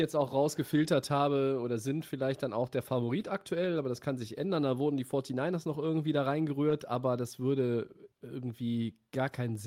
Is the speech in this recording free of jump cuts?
no; 1 cut; at 8.1 s

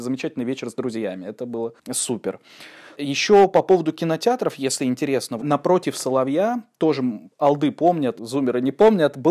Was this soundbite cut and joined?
yes; 2 cuts; at 5.4 s, 8.2 s

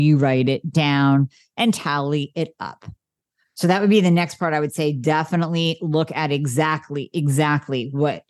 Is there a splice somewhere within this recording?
no; 0 cuts

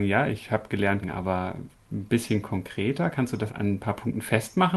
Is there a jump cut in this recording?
yes; 2 cuts; at 1.0 s, 3.5 s

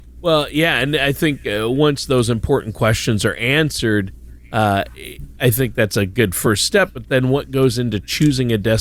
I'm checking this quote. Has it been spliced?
no; 0 cuts

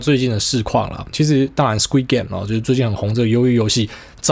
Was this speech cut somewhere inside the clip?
yes; 1 cut; at 1.1 s

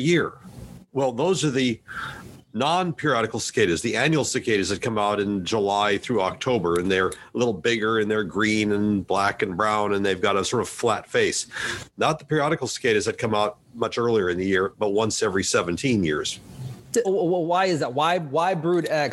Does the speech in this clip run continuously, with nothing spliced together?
no; 1 cut; at 17.0 s

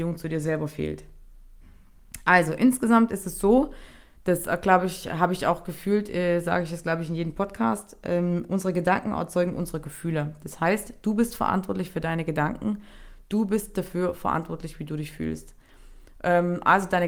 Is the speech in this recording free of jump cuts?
yes; 0 cuts

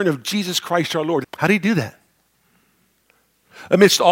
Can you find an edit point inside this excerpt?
yes; 1 cut; at 1.2 s

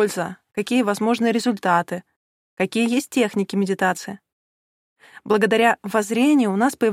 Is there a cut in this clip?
no; 0 cuts

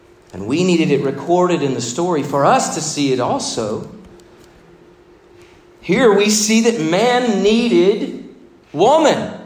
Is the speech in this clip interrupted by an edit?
no; 0 cuts

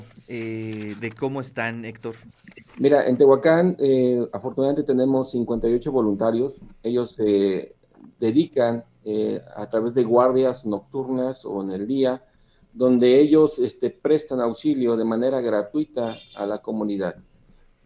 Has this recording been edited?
yes; 1 cut; at 2.7 s

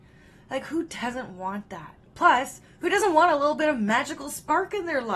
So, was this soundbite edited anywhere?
yes; 1 cut; at 2.1 s

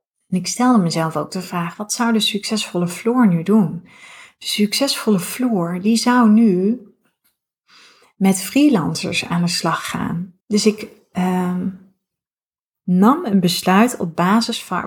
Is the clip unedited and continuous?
no; 1 cut; at 10.4 s

